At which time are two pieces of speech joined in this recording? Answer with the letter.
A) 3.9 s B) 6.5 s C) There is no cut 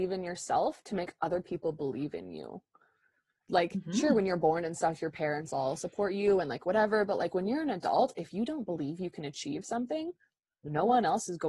C